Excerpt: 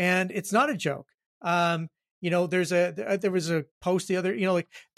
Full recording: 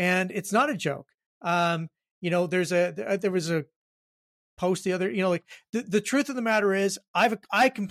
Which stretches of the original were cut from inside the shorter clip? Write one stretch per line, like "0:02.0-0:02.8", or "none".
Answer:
0:03.7-0:04.5